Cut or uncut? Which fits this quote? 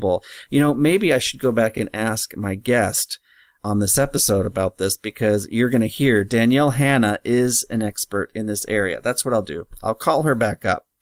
uncut